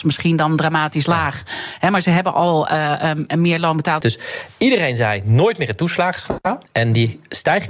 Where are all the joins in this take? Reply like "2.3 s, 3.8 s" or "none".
4.0 s, 6.7 s